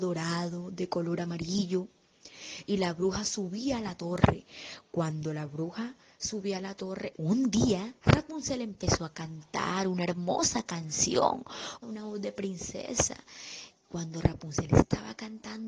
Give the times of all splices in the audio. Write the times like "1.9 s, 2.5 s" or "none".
7.1 s, 11.8 s, 13.7 s